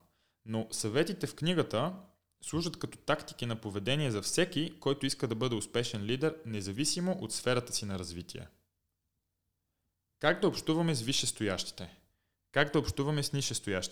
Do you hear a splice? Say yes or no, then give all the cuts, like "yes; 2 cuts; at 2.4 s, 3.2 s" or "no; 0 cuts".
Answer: no; 0 cuts